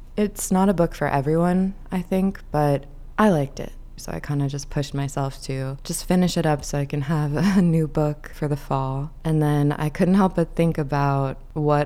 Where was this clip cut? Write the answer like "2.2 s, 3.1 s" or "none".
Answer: 4.0 s